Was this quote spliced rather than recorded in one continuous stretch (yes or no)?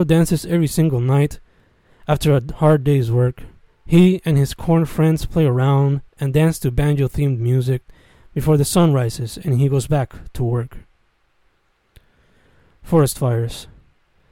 no